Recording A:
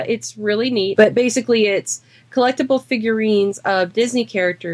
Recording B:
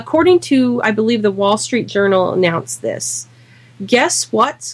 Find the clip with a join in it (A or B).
A